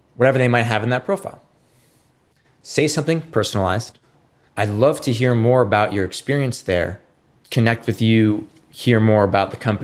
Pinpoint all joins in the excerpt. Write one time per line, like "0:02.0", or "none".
0:04.5